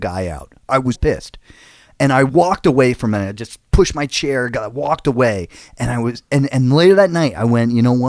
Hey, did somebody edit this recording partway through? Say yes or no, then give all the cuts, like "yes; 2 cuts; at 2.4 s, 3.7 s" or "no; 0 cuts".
yes; 1 cut; at 0.9 s